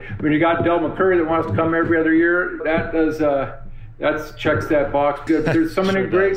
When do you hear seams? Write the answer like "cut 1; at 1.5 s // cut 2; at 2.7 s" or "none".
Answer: cut 1; at 2.6 s // cut 2; at 5.3 s